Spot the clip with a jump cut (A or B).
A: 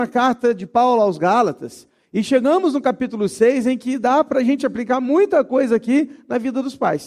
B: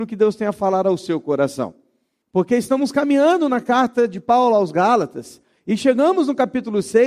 B